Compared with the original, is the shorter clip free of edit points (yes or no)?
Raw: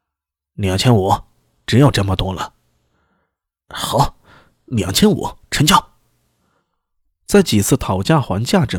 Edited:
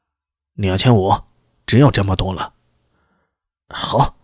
yes